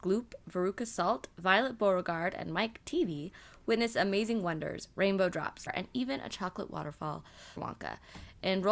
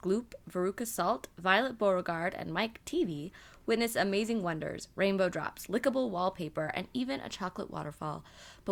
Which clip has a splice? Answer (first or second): first